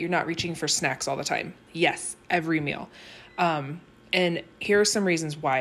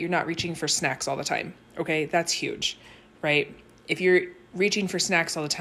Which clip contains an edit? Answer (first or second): first